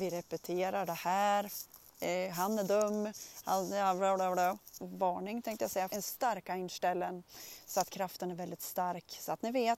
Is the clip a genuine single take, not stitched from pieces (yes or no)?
no